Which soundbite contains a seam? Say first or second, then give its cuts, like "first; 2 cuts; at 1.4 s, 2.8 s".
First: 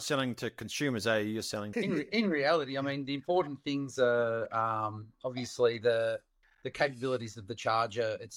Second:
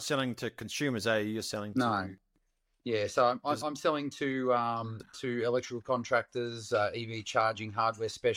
first; 1 cut; at 1.7 s